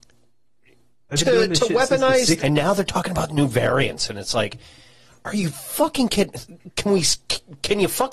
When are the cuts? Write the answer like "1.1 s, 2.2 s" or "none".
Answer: 2.4 s